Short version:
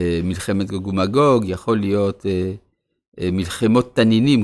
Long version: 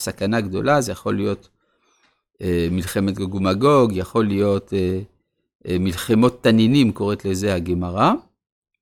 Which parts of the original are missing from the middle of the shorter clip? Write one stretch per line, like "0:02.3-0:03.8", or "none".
none